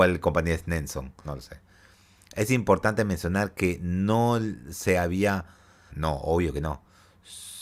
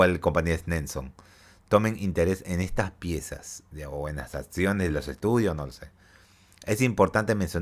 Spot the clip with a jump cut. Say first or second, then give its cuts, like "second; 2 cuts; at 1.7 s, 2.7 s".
first; 2 cuts; at 1.2 s, 5.9 s